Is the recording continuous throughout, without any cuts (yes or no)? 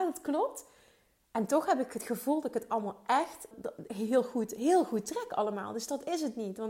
no